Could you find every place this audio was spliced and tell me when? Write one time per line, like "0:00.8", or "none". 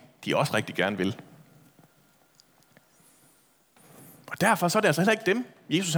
none

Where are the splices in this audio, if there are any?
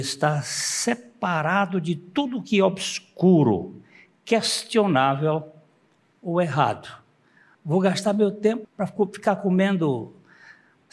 0:07.5
0:08.6

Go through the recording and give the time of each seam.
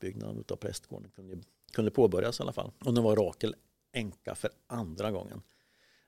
0:02.8

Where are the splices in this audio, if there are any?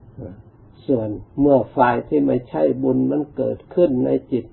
0:01.3

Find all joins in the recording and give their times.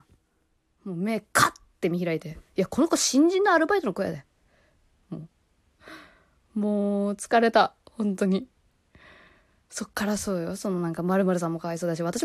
0:05.0

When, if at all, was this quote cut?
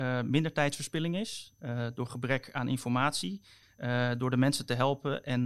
0:03.6

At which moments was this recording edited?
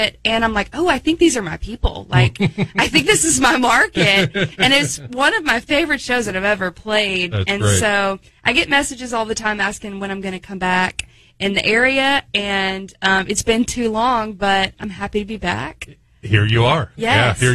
none

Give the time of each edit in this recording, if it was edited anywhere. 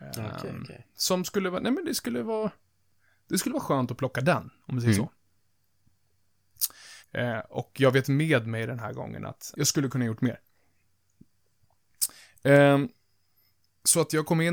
0:07.0
0:09.5

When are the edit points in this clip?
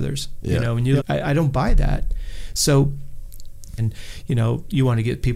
0:01.0
0:03.8

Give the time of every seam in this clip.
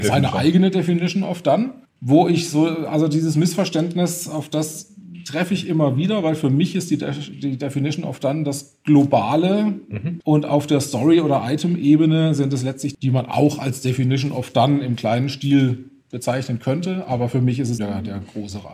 0:10.2
0:12.9
0:17.8

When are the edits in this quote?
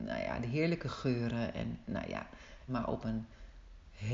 0:02.7

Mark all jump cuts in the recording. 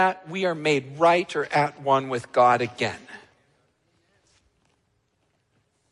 none

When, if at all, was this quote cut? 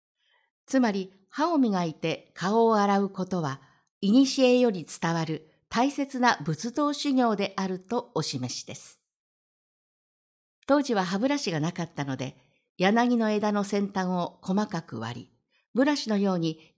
none

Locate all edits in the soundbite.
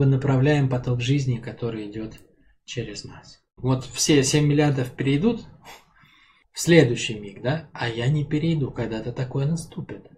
0:03.6

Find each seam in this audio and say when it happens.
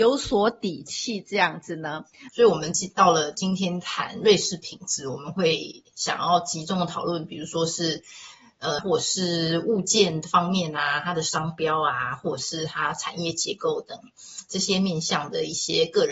0:02.3
0:08.8

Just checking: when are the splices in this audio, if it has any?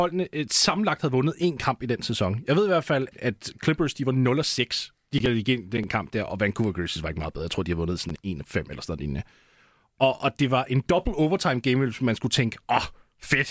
0:03.1

